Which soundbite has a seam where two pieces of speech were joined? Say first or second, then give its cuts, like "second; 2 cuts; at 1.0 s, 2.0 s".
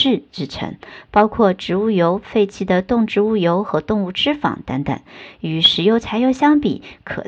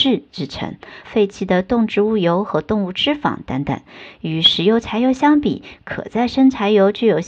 second; 1 cut; at 1.0 s